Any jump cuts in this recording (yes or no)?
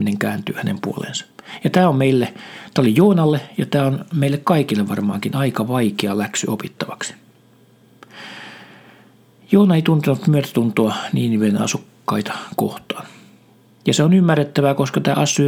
no